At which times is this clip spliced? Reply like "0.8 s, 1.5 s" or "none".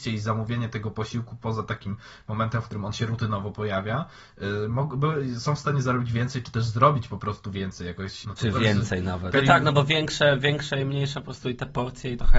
8.2 s, 9.3 s